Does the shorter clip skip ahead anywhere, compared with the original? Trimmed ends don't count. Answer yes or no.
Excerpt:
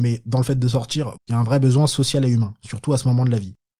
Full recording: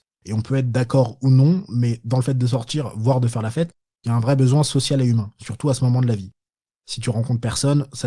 yes